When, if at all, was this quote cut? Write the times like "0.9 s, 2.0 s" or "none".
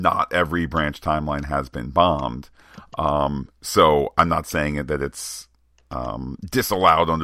none